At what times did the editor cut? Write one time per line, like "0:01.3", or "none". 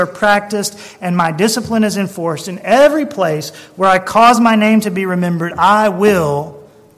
none